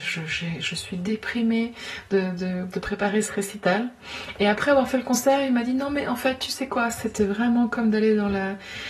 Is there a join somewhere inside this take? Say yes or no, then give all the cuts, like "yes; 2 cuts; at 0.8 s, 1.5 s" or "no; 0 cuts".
no; 0 cuts